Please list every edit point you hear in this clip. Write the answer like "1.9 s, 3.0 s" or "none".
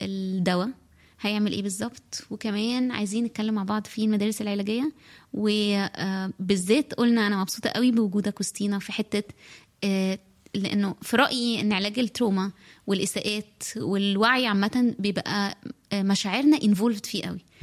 none

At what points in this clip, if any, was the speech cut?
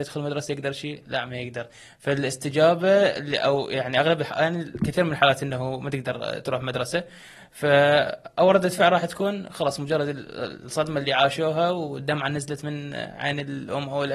none

